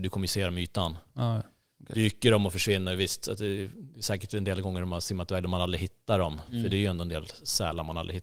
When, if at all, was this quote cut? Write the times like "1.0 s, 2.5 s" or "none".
none